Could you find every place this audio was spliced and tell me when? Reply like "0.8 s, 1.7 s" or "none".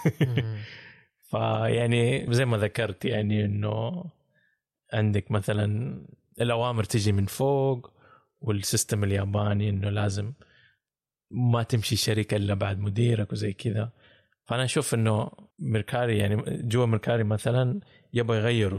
2.3 s, 15.5 s